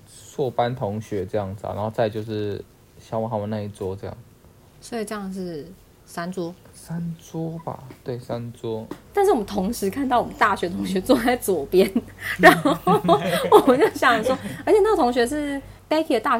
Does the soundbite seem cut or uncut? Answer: cut